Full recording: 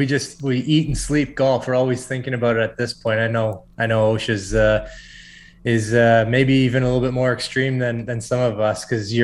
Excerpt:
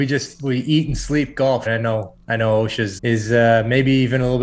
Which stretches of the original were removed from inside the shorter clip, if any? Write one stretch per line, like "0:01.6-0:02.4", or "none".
0:01.7-0:03.2
0:04.5-0:05.6